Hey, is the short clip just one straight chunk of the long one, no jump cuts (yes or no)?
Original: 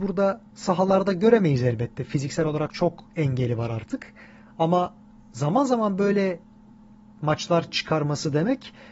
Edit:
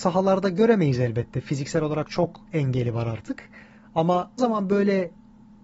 no